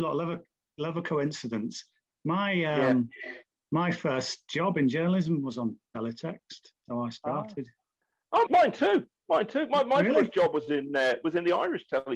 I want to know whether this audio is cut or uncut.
cut